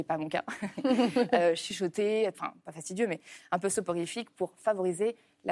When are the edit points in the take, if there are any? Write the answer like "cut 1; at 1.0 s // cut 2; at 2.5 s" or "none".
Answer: cut 1; at 2.3 s